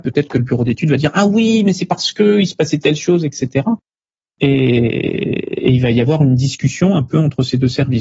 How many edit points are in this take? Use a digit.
0